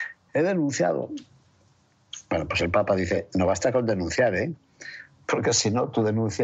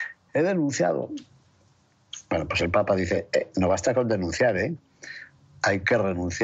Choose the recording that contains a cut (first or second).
first